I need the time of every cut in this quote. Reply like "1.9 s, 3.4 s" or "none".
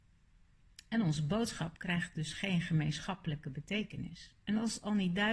4.4 s